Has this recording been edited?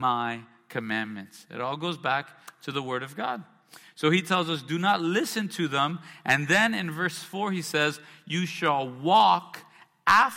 no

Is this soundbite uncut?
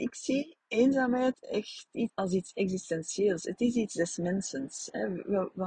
no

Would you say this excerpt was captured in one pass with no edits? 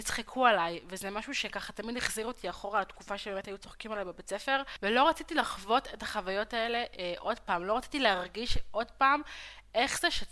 yes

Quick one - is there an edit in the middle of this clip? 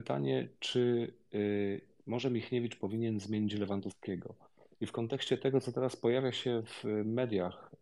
no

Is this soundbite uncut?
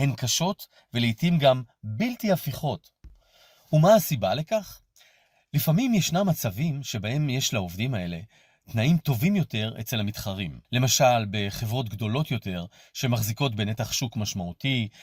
no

